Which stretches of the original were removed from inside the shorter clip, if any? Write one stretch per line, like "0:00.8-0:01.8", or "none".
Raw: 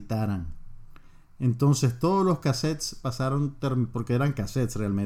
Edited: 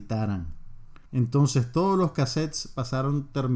0:01.1-0:01.3

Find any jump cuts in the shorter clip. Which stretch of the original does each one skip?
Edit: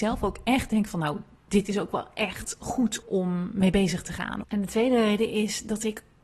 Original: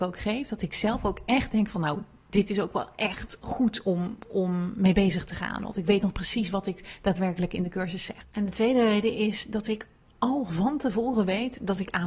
0:03.8-0:04.2
0:05.7-0:08.3

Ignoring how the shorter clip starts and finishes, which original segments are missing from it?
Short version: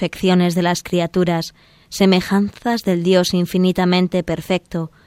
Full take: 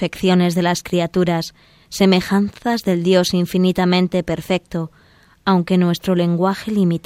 none

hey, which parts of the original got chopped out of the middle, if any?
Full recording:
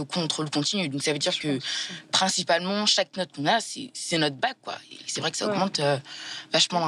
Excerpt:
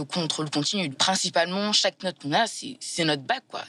0:00.9-0:02.0

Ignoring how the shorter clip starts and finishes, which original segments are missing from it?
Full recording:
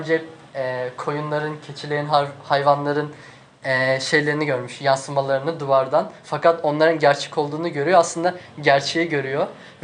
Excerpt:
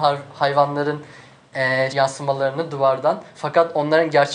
0:04.0-0:04.8

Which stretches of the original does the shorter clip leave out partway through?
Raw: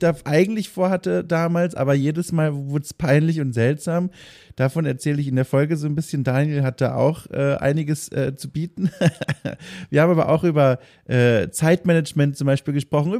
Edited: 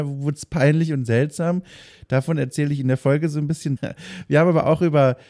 0:06.2-0:09.4

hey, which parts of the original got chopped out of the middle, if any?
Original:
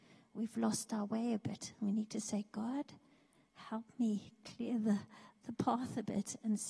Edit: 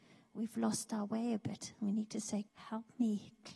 0:02.5-0:03.5

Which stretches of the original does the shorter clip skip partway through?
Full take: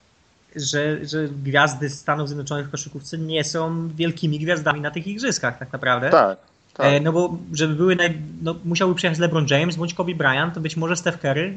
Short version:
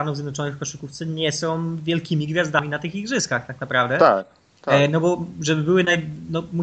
none

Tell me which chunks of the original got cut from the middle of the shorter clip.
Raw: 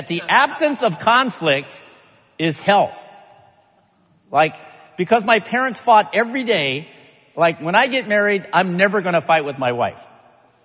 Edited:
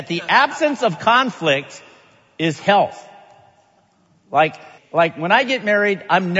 0:04.8-0:07.2

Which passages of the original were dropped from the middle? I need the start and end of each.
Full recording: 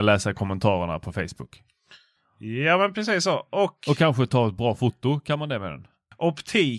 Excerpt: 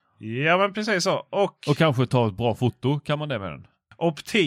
none

